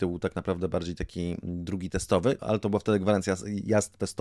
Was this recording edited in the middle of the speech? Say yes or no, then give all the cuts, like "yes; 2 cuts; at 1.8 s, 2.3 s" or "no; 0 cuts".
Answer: yes; 1 cut; at 2.4 s